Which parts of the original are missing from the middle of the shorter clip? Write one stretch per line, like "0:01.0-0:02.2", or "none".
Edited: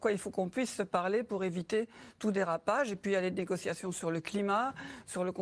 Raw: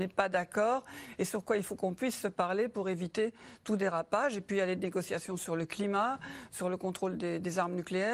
none